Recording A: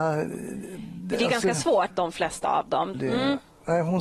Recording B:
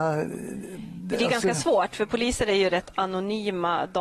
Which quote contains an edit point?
A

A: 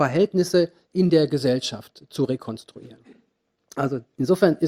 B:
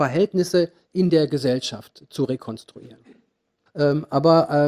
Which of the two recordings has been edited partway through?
B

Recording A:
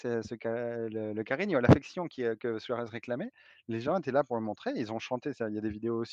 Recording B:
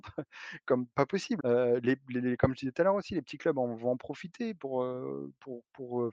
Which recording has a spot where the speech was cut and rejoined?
B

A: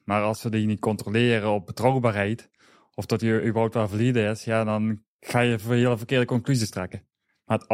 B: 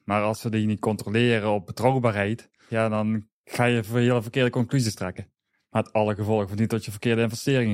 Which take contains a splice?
B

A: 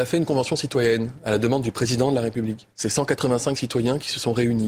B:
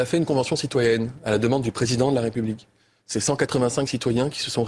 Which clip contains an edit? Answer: A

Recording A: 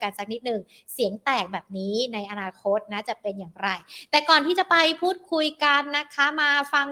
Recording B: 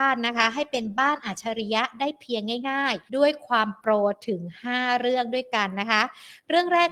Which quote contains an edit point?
B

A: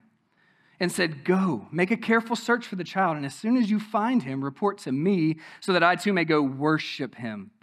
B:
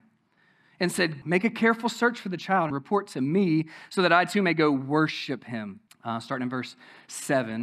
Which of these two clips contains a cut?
B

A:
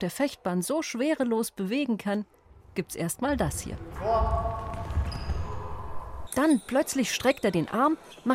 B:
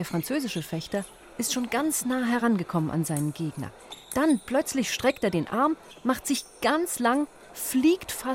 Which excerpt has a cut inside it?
A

